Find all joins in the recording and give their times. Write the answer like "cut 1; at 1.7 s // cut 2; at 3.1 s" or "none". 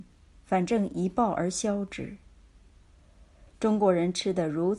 cut 1; at 3.5 s